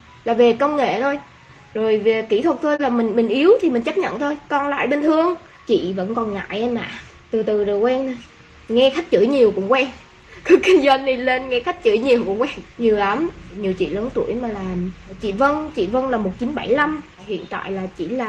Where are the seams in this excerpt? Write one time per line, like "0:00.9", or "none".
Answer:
0:12.7